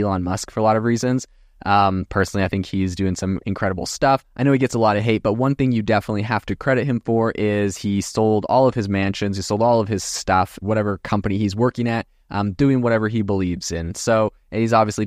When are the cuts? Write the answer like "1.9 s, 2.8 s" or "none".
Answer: 10.6 s